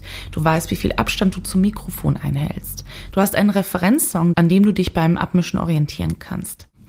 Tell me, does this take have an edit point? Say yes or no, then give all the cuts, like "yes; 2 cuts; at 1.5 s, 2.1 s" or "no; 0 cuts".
yes; 2 cuts; at 3.1 s, 4.3 s